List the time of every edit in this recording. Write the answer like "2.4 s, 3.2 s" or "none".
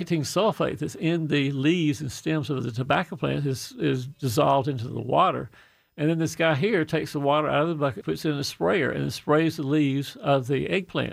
8.0 s